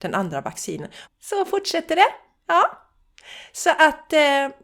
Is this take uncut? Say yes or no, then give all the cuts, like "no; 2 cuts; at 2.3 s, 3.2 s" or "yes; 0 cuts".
no; 1 cut; at 1.0 s